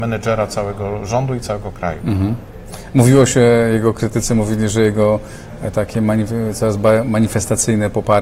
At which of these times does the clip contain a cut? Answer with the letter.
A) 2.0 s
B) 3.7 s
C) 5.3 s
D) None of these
D